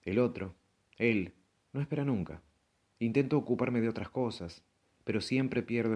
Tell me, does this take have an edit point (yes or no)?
yes